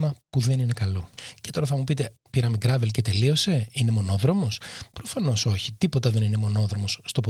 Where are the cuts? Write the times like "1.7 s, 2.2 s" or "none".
2.3 s